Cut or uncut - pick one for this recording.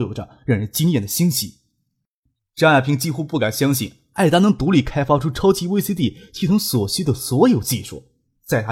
uncut